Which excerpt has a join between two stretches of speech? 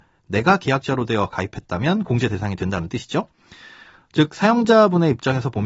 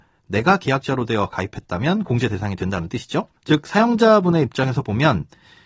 second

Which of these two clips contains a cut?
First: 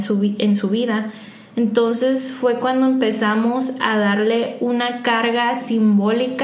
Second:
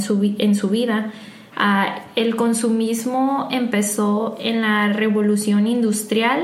second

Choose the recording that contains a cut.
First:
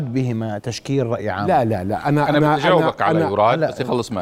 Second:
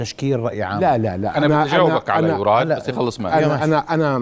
second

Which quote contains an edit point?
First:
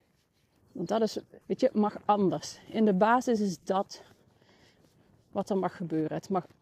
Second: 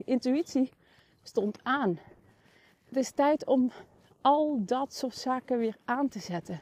first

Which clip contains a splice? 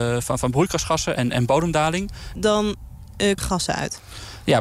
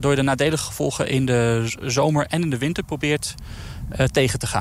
first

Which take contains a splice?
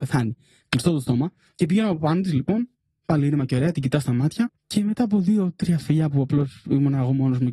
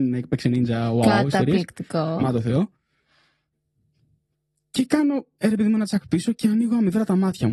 first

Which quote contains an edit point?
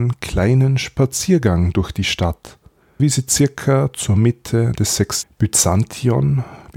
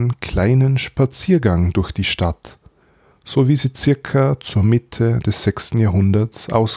first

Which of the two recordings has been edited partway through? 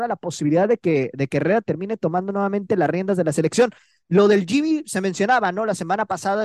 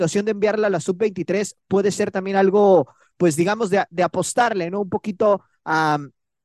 second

